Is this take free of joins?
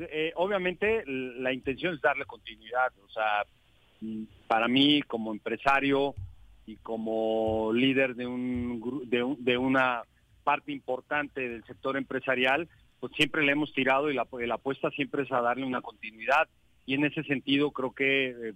yes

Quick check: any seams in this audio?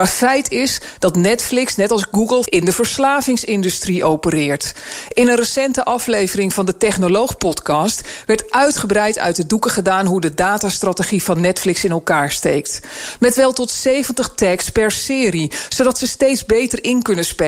yes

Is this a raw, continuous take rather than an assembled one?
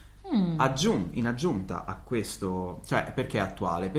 yes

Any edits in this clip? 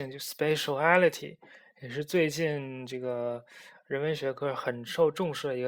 no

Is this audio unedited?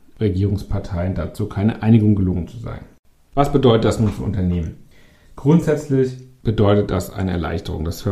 yes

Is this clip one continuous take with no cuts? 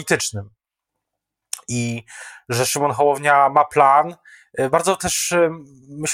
yes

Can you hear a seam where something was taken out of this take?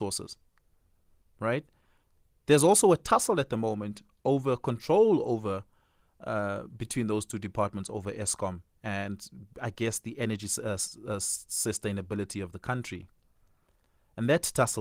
no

